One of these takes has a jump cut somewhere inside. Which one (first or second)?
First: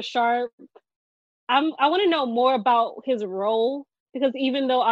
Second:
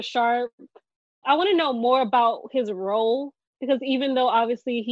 second